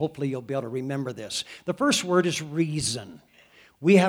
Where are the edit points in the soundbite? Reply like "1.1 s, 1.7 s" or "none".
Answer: none